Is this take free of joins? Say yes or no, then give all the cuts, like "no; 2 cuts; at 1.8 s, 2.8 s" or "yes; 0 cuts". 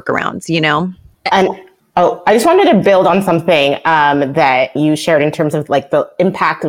no; 2 cuts; at 1.1 s, 4.8 s